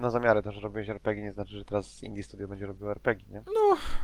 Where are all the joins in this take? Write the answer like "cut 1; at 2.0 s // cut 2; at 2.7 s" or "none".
none